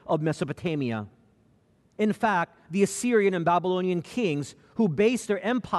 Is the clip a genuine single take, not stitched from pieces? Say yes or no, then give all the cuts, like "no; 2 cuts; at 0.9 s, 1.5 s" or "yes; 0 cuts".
no; 1 cut; at 2.0 s